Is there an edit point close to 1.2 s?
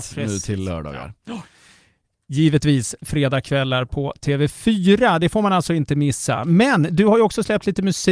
no; 0 cuts

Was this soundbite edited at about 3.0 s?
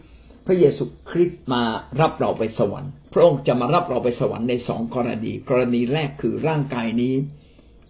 yes; 1 cut; at 3.0 s

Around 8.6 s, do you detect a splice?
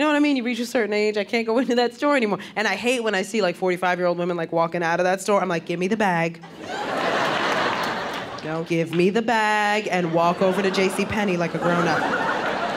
yes; 1 cut; at 8.6 s

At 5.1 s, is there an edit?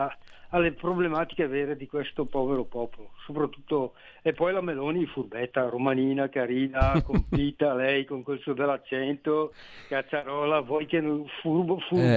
no; 0 cuts

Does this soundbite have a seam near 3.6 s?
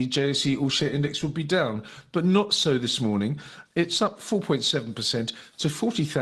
yes; 1 cut; at 3.6 s

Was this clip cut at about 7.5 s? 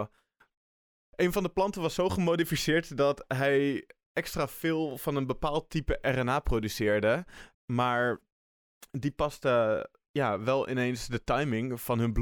yes; 1 cut; at 7.5 s

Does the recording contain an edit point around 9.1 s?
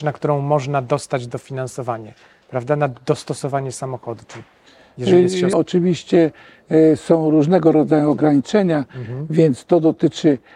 no; 1 cut; at 5.5 s

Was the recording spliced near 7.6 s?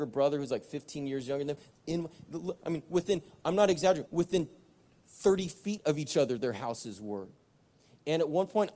no; 2 cuts; at 1.7 s, 4.0 s

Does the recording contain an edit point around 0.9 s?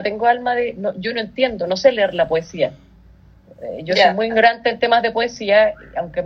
no; 0 cuts

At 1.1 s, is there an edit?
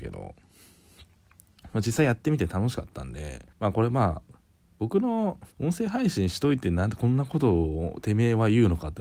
no; 2 cuts; at 3.5 s, 5.5 s

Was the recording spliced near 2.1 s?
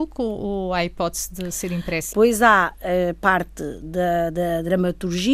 yes; 1 cut; at 2.1 s

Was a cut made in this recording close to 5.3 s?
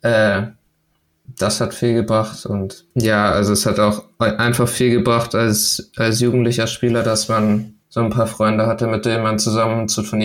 no; 2 cuts; at 2.9 s, 7.8 s

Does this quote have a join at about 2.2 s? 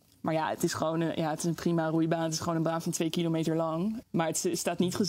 no; 1 cut; at 4.0 s

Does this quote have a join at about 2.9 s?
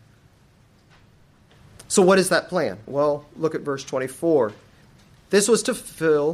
yes; 1 cut; at 2.9 s

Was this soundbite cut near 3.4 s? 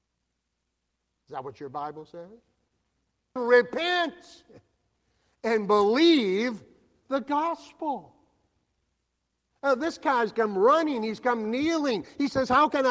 yes; 1 cut; at 3.4 s

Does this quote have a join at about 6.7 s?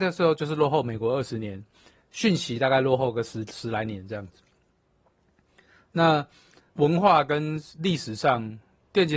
yes; 1 cut; at 6.7 s

